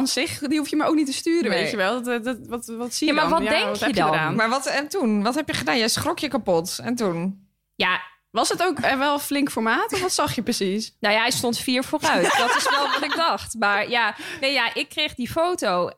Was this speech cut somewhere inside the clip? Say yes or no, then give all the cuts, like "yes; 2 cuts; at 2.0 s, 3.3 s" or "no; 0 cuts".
no; 0 cuts